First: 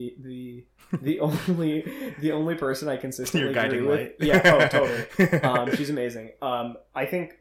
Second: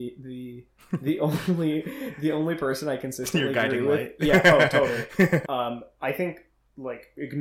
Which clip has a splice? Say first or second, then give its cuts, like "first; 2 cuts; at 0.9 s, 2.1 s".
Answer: second; 1 cut; at 5.4 s